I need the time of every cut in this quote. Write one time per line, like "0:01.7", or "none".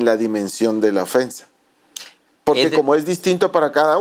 none